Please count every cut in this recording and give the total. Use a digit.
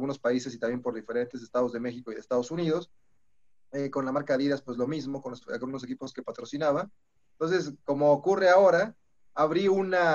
1